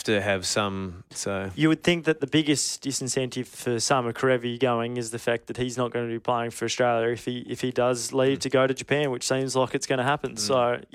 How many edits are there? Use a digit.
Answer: 1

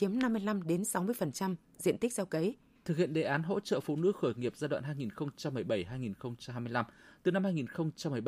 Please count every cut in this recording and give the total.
1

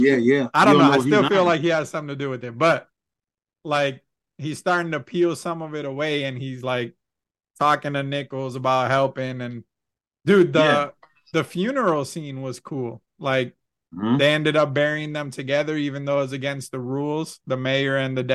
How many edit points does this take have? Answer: 0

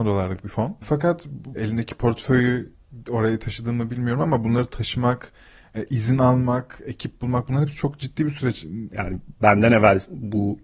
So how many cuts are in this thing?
2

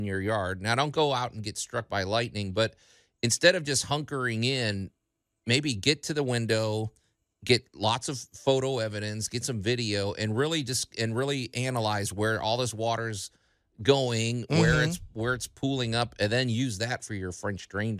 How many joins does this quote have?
0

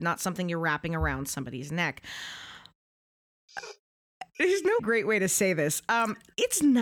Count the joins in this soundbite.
1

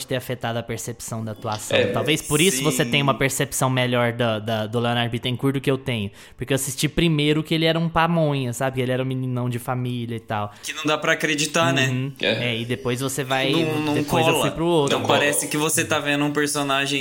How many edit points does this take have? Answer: 0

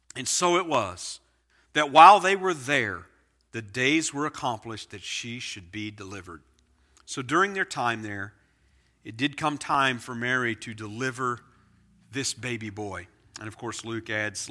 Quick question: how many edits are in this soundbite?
0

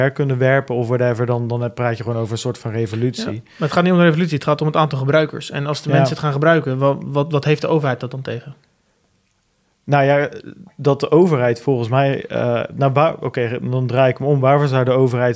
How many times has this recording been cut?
0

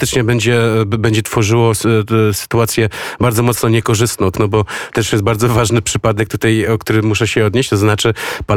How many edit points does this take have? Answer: 1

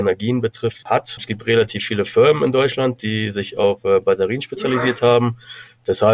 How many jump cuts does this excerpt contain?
1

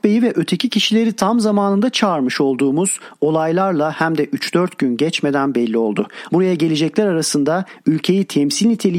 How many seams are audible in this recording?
1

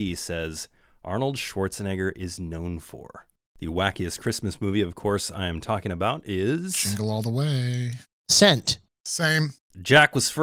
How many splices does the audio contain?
0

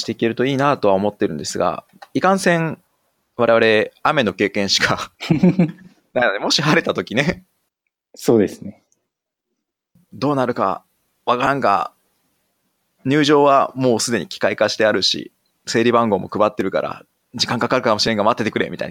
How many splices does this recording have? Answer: 1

